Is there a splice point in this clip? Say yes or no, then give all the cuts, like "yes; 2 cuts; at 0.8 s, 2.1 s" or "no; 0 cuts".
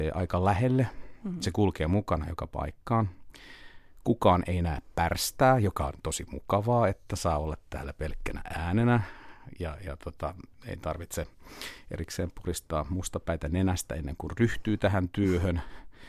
no; 0 cuts